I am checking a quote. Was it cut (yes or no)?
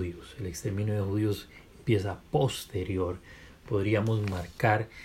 no